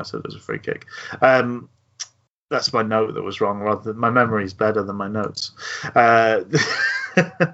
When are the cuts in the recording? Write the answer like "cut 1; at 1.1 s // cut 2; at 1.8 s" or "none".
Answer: none

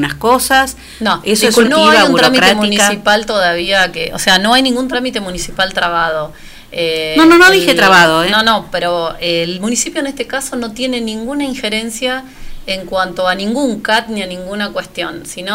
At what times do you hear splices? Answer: cut 1; at 1.6 s

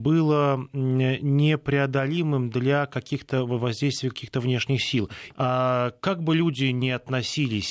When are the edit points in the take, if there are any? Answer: cut 1; at 5.3 s

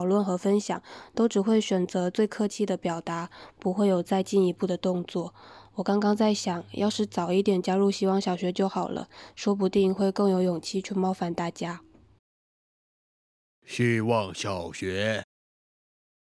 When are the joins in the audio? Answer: none

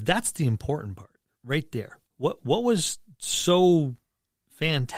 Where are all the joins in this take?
cut 1; at 2.1 s

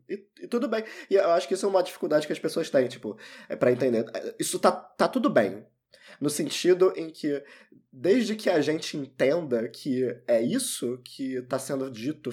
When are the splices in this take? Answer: none

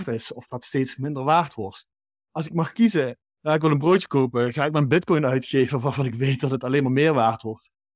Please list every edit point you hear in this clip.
cut 1; at 3.2 s

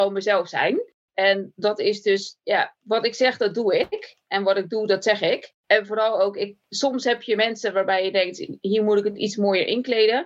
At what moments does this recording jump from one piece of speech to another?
none

